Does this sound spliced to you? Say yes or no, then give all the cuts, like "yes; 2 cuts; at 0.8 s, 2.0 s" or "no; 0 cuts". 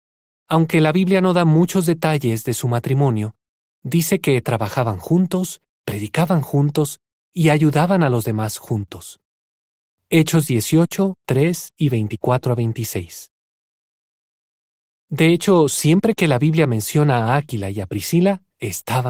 yes; 1 cut; at 11.2 s